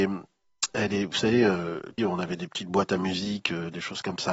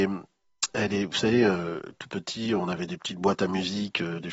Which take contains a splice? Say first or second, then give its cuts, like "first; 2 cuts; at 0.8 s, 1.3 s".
first; 1 cut; at 2.0 s